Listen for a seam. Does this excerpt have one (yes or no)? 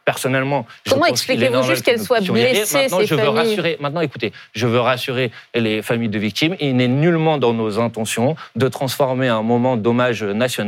no